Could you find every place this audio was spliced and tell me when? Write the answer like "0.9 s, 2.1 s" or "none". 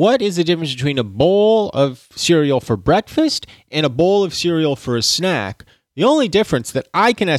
none

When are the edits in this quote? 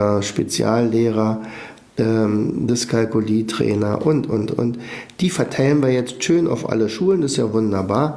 none

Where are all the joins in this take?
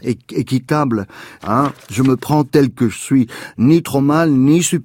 1.4 s

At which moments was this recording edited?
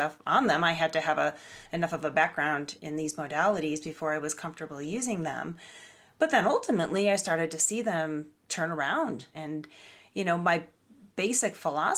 2.8 s, 9.3 s

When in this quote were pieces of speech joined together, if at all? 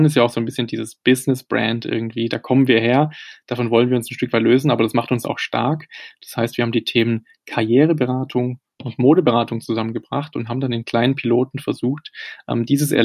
none

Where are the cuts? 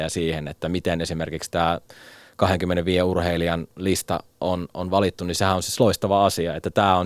none

